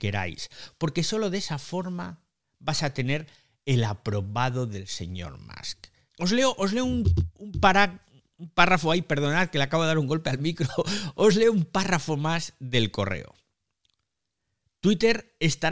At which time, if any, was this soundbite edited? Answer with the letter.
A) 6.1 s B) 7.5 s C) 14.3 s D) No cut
A